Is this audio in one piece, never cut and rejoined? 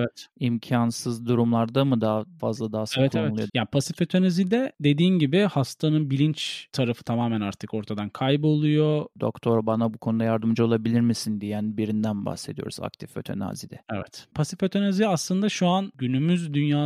no; 3 cuts; at 3.5 s, 9.1 s, 14.3 s

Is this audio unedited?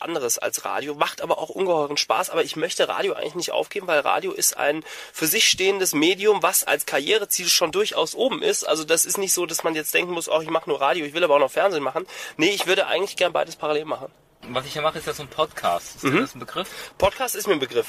yes; 0 cuts

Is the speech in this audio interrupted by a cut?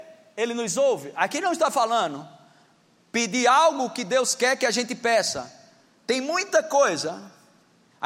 no; 0 cuts

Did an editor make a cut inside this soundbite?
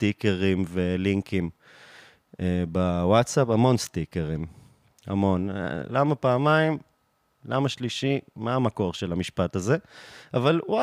yes; 1 cut; at 5.9 s

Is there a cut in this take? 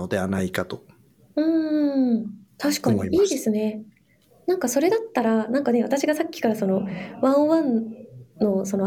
no; 0 cuts

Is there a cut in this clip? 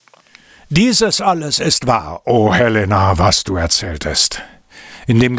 no; 0 cuts

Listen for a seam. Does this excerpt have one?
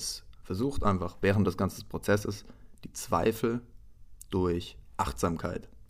no; 0 cuts

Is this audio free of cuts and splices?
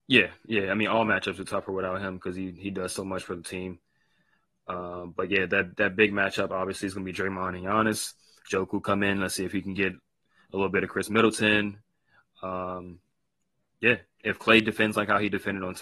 yes; 0 cuts

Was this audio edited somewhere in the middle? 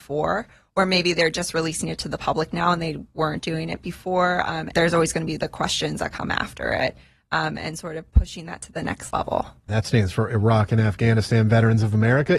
yes; 2 cuts; at 4.7 s, 9.7 s

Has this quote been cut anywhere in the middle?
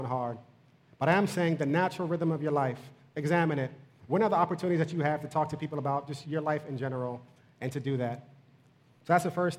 yes; 1 cut; at 6.2 s

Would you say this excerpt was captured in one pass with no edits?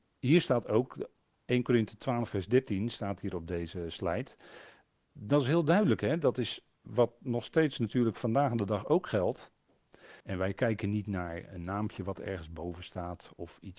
no; 1 cut; at 10.2 s

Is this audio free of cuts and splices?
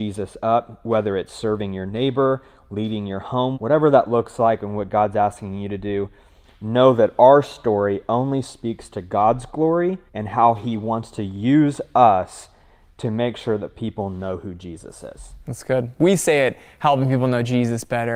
no; 2 cuts; at 3.5 s, 10.1 s

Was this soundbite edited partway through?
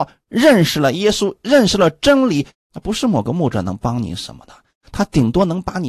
yes; 1 cut; at 2.5 s

